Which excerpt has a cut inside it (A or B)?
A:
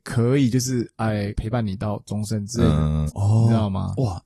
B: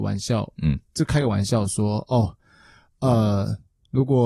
A